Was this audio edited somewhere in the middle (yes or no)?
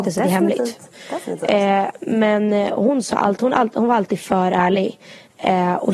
no